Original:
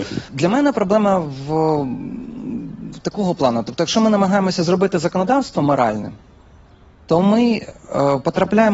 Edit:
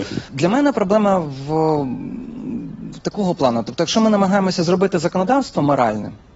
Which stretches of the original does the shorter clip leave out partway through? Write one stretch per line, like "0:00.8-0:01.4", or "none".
none